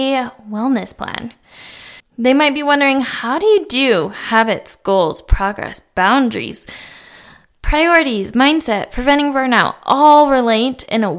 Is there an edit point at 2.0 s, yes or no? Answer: yes